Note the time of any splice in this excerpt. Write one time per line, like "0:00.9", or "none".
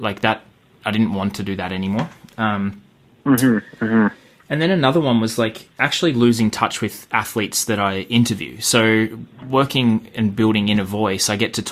none